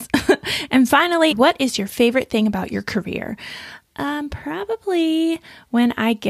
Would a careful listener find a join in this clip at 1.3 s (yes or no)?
yes